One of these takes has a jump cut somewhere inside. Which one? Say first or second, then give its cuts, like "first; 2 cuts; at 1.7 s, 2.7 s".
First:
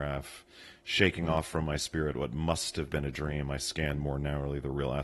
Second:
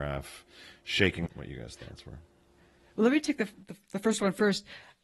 second; 1 cut; at 1.3 s